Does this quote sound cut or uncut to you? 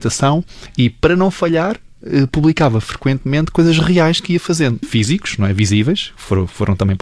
cut